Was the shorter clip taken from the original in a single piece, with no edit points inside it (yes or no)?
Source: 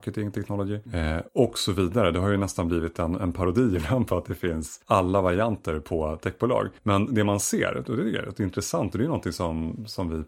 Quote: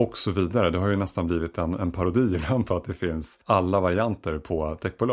yes